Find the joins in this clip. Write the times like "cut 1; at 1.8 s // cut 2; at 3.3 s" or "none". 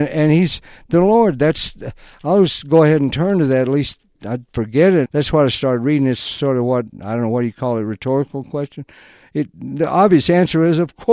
cut 1; at 5.1 s